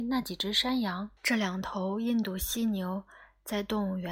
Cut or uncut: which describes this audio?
cut